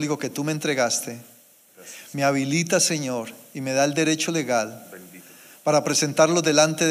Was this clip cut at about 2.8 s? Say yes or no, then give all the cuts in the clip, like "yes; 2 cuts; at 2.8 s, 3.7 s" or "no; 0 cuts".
no; 0 cuts